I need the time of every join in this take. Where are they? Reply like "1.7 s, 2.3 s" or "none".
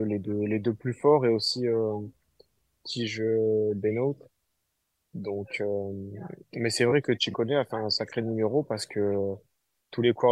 none